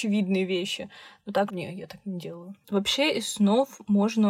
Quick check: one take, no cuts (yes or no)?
no